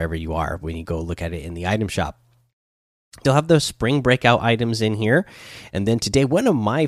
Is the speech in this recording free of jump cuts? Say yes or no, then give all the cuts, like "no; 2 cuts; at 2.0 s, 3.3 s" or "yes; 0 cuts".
no; 1 cut; at 3.2 s